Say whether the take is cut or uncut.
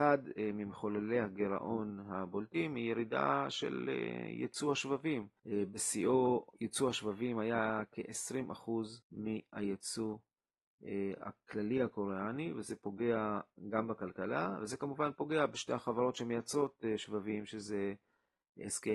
cut